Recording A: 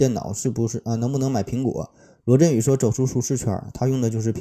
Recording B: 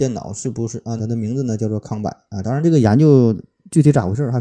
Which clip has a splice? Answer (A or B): B